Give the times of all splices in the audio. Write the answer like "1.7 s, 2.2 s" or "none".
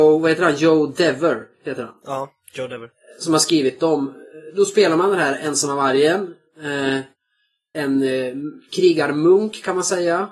7.7 s